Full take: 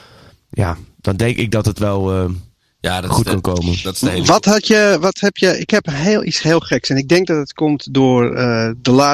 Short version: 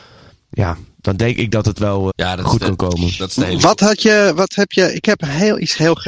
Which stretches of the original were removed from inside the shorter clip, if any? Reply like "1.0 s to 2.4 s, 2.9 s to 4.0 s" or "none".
2.1 s to 2.7 s